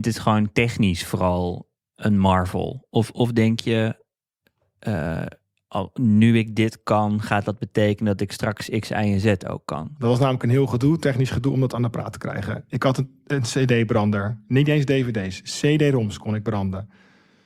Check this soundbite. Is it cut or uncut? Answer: cut